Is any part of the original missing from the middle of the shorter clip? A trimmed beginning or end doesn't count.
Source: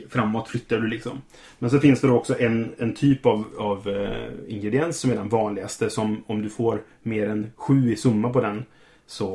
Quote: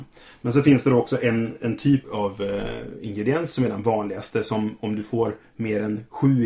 yes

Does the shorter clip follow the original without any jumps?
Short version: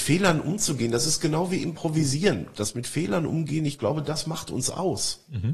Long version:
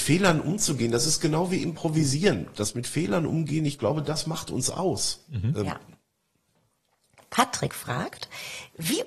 yes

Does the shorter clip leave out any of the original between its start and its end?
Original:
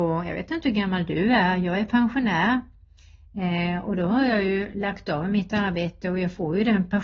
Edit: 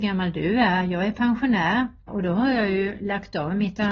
yes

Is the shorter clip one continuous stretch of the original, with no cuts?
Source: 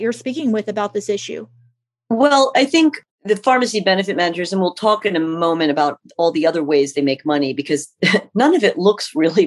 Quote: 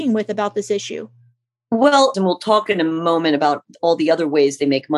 no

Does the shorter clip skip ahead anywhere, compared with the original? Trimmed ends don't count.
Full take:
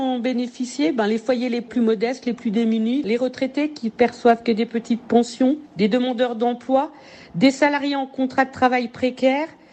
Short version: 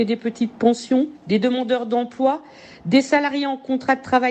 no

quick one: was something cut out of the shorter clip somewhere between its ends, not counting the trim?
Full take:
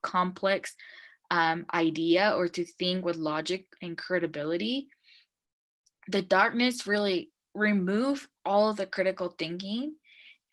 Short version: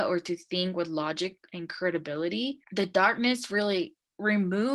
yes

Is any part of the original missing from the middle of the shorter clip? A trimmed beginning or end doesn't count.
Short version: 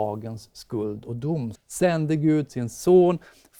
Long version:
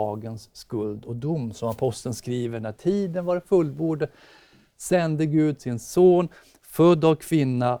yes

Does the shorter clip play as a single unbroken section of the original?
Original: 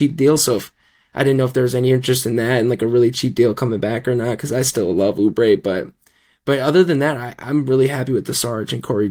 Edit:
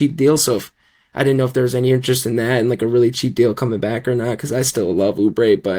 yes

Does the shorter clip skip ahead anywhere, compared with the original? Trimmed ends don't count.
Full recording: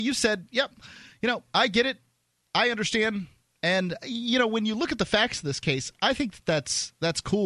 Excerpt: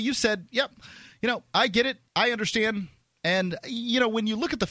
yes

